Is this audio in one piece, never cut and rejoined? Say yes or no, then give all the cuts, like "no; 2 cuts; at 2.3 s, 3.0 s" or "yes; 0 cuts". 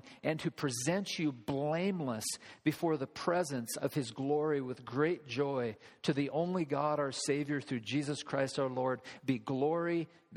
yes; 0 cuts